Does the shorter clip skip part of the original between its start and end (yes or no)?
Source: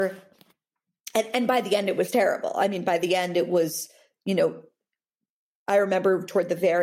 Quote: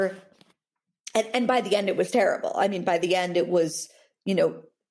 no